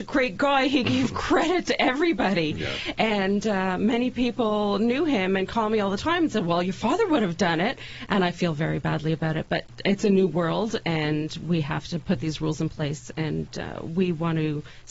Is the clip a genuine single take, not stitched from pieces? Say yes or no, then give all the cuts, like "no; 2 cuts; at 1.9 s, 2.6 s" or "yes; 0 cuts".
yes; 0 cuts